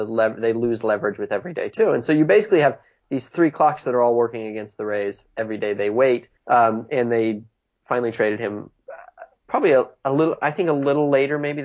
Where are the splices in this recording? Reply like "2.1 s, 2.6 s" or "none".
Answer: 6.4 s